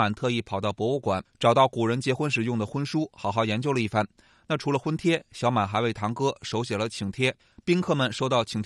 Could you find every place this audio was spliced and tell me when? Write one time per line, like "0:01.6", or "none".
none